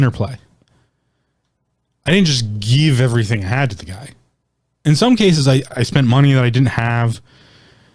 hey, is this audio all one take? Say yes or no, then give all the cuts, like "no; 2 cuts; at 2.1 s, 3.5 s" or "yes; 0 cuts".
no; 1 cut; at 5.6 s